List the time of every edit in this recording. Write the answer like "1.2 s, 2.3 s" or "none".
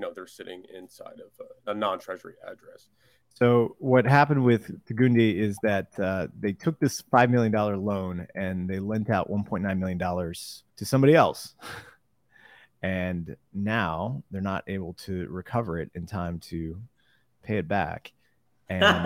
1.6 s, 3.2 s, 10.7 s

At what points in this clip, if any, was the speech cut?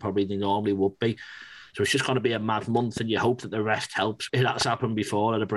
4.3 s

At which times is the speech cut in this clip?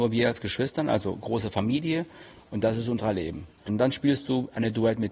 2.4 s, 3.7 s

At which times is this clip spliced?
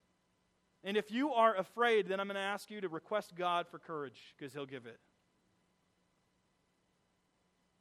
none

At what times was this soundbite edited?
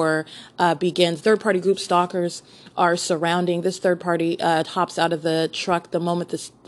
1.2 s

